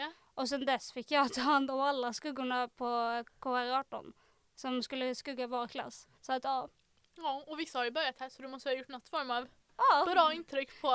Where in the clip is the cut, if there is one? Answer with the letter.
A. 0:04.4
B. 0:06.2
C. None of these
B